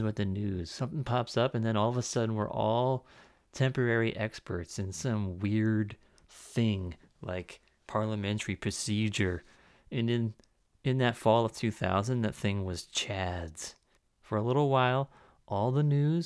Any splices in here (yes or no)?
no